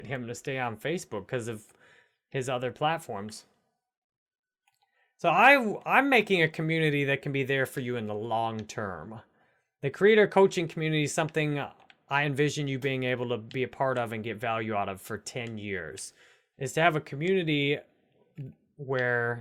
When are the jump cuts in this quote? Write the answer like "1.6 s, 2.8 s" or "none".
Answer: 16.5 s